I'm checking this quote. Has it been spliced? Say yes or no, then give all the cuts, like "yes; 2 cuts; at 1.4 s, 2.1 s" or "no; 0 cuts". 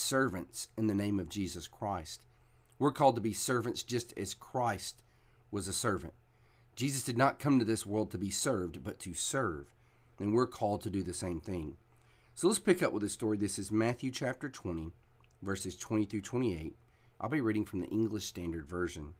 no; 0 cuts